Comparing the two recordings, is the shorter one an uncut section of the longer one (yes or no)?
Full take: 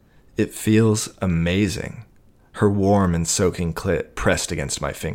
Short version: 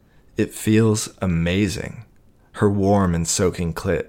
yes